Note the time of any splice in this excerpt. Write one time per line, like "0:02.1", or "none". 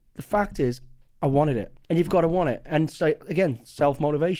0:01.8